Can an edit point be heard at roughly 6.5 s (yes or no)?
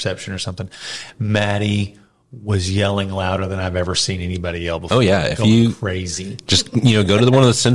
no